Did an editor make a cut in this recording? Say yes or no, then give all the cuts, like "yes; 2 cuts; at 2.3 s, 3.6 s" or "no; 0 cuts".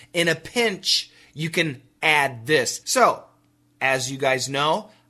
yes; 1 cut; at 2.8 s